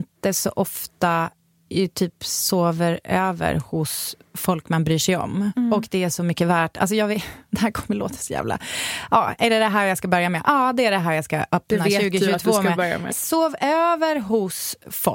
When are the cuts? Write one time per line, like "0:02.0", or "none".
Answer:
0:13.1